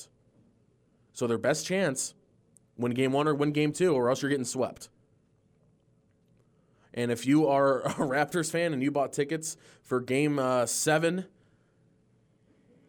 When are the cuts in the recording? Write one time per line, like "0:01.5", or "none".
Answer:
none

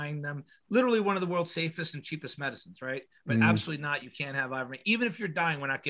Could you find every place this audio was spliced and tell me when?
none

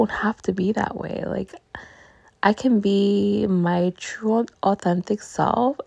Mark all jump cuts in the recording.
none

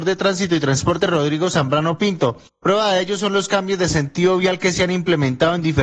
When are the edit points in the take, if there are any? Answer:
none

